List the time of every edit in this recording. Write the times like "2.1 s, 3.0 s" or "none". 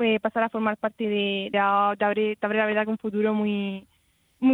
1.5 s